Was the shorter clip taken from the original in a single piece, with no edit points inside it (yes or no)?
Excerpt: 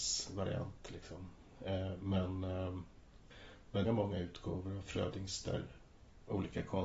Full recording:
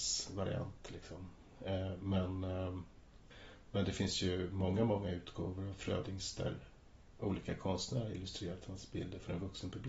no